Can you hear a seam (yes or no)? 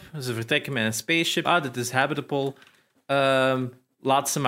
yes